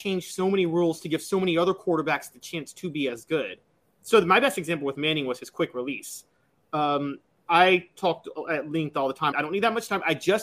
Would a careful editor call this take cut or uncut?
cut